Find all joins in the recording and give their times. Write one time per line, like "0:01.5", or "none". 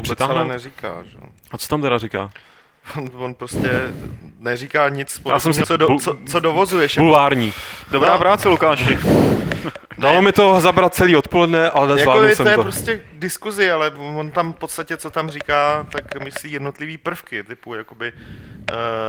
0:05.6

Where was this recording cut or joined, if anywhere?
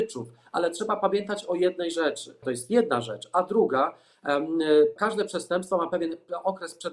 0:02.4
0:05.0

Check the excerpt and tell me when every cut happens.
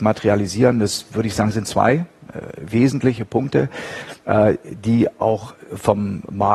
none

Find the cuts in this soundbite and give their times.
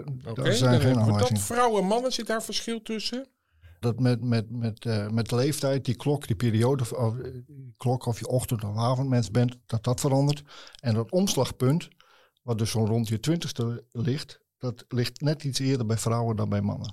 0:03.8

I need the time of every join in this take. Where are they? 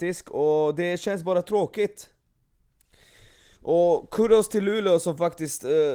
none

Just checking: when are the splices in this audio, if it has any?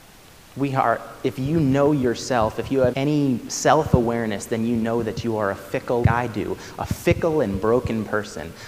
0:02.9
0:06.0

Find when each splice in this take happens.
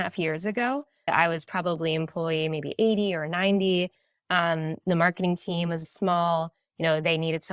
0:01.1
0:05.8

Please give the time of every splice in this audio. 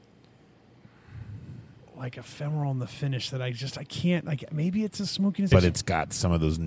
0:05.5

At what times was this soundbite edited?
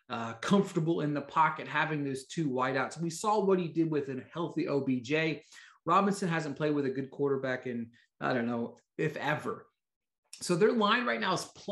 none

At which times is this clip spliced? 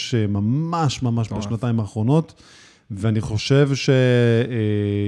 none

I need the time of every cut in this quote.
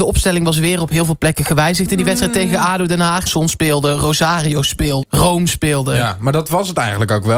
0:03.3
0:05.0

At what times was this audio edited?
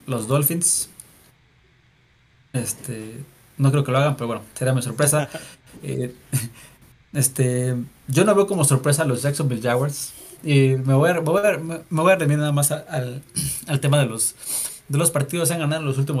0:10.4

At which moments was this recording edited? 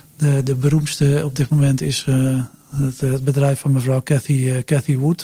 none

